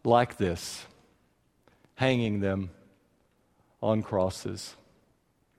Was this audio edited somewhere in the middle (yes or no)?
no